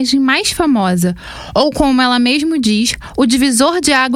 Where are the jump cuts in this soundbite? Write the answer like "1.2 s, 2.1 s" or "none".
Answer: none